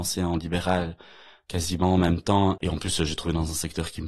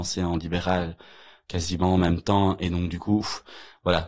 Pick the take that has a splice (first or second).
first